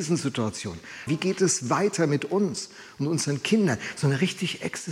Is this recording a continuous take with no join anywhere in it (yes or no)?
no